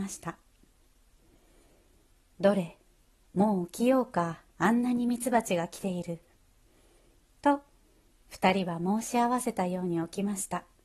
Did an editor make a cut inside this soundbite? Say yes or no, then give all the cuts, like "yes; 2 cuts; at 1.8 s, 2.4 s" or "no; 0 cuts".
yes; 1 cut; at 4.5 s